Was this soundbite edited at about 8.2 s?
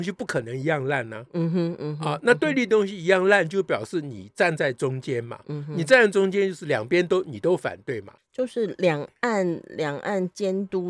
yes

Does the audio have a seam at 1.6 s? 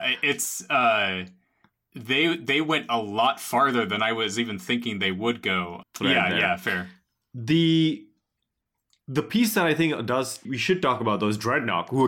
no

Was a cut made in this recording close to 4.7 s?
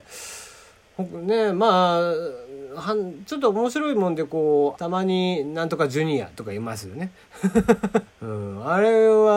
yes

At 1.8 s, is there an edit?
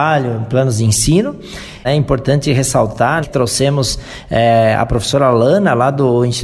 yes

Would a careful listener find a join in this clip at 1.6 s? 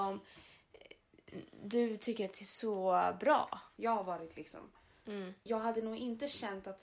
no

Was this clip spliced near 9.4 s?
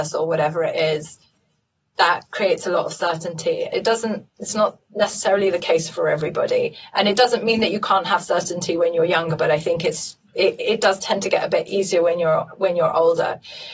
no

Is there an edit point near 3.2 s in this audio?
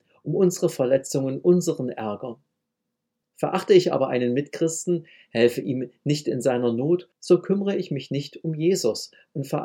yes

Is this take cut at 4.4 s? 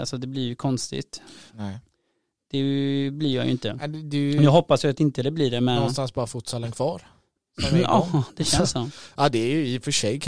no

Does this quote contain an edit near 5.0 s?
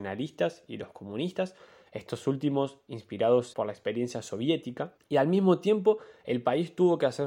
yes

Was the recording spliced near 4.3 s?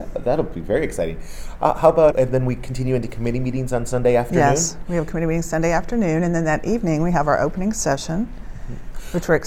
no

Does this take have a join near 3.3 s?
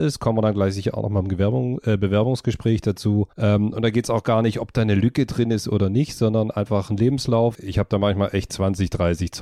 yes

